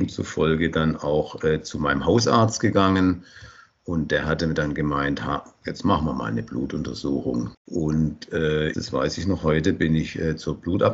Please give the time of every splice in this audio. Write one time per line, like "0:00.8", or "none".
0:07.5
0:08.7